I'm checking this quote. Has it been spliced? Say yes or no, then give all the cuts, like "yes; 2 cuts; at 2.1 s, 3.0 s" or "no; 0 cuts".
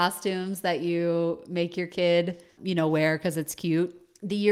yes; 1 cut; at 2.6 s